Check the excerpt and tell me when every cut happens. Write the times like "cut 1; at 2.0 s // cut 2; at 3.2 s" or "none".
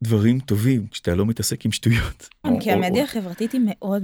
cut 1; at 2.4 s